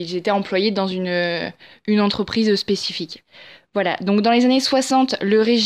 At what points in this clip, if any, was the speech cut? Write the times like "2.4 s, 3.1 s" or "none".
none

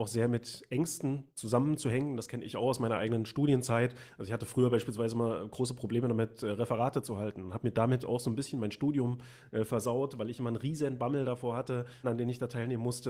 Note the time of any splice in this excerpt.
12.0 s

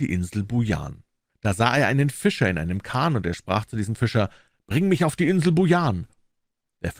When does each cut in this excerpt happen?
1.3 s

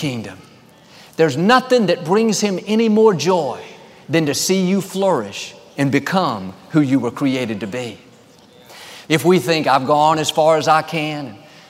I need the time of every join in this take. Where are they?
9.0 s

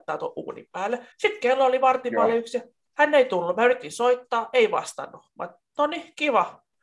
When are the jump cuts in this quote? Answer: 1.1 s

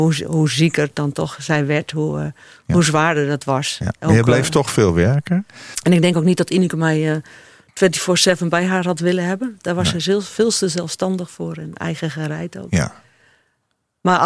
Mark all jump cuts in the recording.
5.7 s

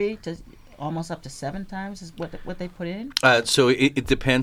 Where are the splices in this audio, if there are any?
none

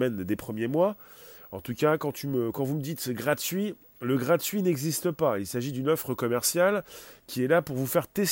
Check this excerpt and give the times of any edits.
none

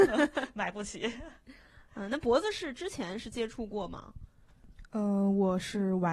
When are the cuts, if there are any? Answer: none

